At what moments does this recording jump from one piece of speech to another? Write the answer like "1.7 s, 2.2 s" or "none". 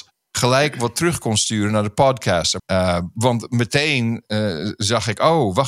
2.6 s